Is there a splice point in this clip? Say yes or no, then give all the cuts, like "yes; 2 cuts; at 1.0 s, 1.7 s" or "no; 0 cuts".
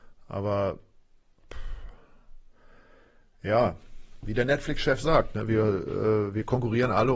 no; 0 cuts